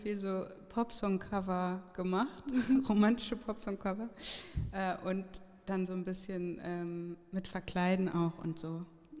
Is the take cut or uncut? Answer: uncut